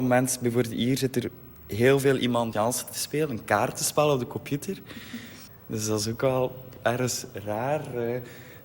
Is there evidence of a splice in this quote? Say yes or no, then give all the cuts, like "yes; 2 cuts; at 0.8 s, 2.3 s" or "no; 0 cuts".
yes; 2 cuts; at 2.5 s, 5.5 s